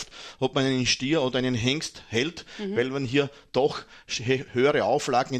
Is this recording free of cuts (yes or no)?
yes